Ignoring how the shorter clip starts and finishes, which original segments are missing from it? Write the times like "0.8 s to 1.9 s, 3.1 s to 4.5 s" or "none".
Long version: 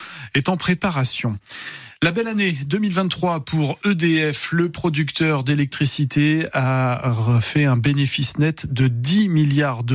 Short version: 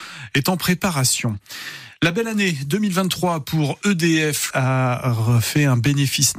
4.5 s to 6.5 s